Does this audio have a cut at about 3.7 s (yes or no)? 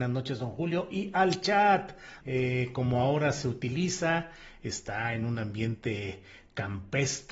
no